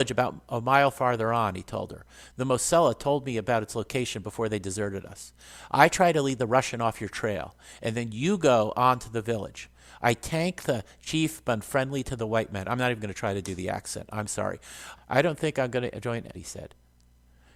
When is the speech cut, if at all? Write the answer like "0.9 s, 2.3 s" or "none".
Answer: 15.0 s, 16.3 s

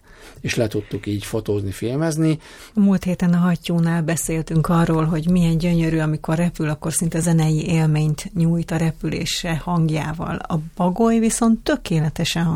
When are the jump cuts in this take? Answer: 2.7 s

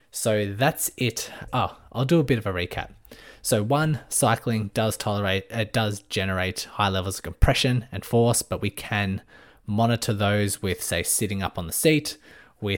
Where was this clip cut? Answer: 1.5 s

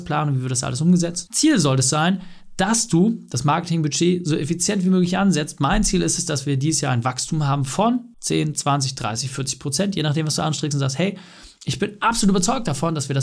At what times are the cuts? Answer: 1.3 s

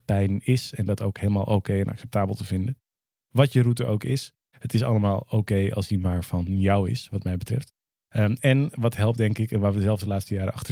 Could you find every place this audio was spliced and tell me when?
none

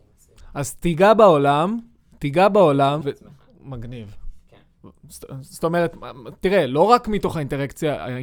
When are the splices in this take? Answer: 3.0 s

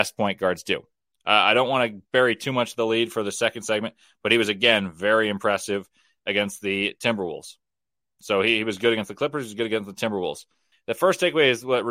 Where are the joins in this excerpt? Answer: 10.7 s

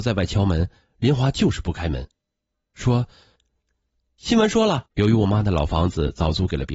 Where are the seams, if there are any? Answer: 4.9 s

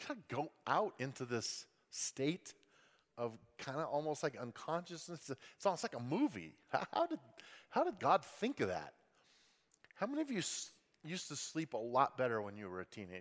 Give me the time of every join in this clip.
none

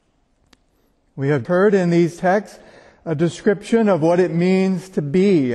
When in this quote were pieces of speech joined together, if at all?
1.5 s

